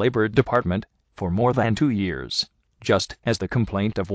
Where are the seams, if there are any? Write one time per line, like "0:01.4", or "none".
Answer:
none

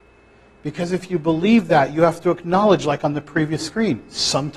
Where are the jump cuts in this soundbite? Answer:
none

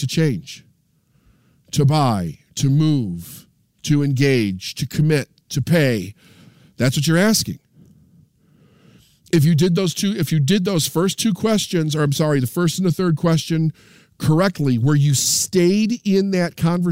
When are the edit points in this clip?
none

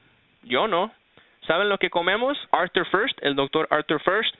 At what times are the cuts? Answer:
0:02.5

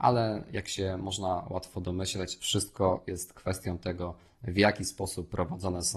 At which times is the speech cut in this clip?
none

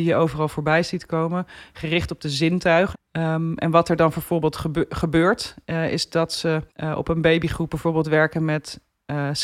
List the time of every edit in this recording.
0:02.9
0:06.7

